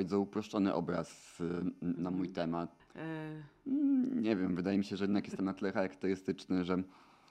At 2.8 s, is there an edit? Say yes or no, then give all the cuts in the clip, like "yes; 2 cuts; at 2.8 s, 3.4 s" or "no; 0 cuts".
yes; 1 cut; at 2.8 s